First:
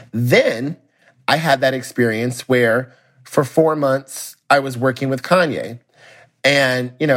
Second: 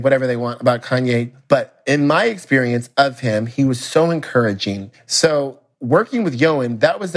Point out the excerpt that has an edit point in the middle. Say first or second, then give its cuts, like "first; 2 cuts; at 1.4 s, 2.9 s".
second; 1 cut; at 5.0 s